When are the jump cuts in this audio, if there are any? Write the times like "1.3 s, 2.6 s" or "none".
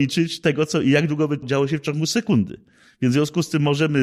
1.4 s

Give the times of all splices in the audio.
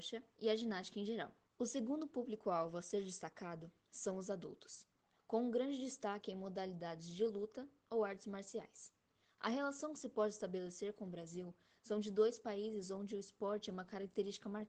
1.4 s

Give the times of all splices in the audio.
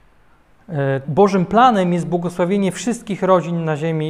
1.0 s

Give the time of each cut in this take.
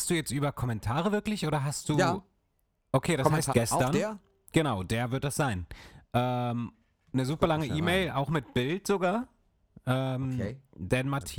3.5 s

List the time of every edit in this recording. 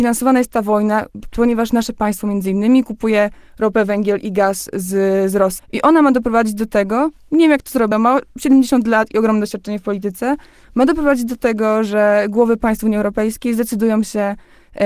5.6 s, 7.9 s

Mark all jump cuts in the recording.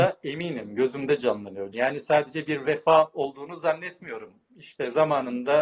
1.7 s

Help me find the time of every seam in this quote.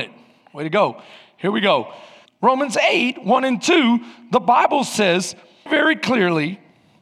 2.2 s, 5.7 s

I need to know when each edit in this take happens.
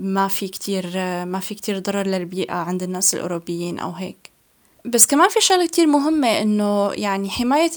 none

